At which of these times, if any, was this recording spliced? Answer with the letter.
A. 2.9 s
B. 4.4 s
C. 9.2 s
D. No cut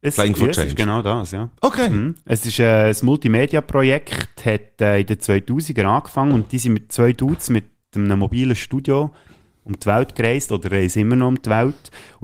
D